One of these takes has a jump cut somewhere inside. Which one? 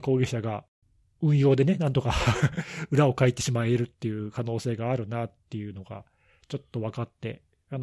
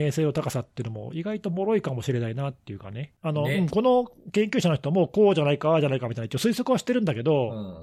second; 1 cut; at 3.2 s

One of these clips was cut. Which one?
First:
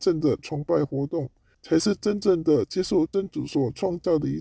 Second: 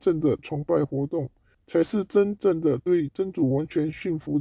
second; 1 cut; at 1.6 s

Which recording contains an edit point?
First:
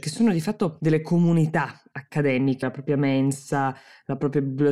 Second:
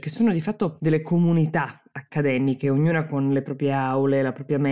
first; 1 cut; at 2.6 s

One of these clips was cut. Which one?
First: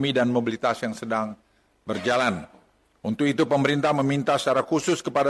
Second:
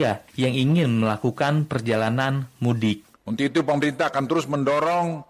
second; 1 cut; at 3.1 s

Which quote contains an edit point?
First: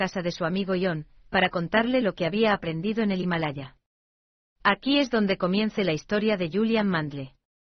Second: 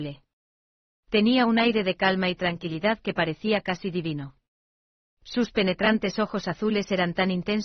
first; 1 cut; at 5.8 s

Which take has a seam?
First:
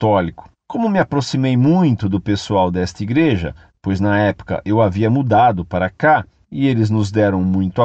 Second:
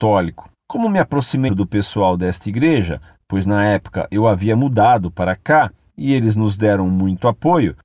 second; 1 cut; at 1.5 s

